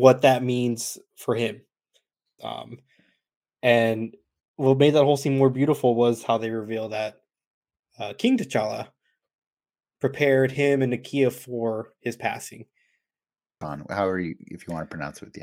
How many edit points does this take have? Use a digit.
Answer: 2